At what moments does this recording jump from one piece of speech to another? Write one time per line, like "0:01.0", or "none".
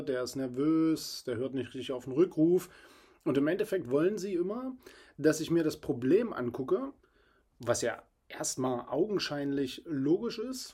none